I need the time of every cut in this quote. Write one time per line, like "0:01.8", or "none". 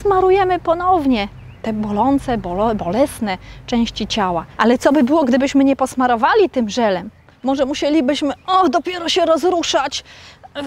0:04.6
0:07.3